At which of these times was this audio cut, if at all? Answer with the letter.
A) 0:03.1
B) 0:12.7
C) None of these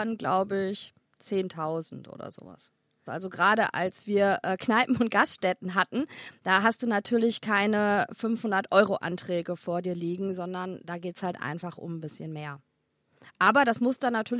A